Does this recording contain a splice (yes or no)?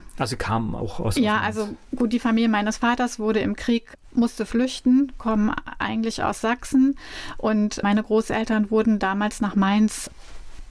no